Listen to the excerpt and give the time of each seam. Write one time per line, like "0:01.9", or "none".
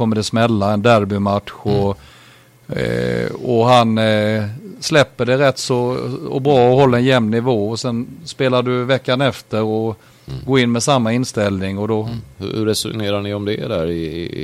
0:12.3